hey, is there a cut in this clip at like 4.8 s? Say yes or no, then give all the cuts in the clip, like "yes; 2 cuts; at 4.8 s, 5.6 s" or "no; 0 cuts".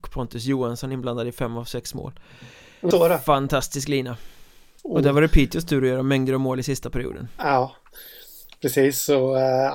yes; 2 cuts; at 2.9 s, 4.8 s